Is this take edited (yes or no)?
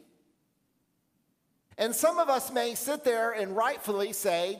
yes